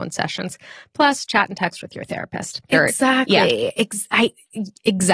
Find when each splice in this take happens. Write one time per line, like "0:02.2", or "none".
0:02.7